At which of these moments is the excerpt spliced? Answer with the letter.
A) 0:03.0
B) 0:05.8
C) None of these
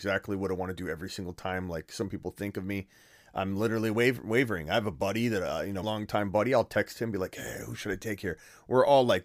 B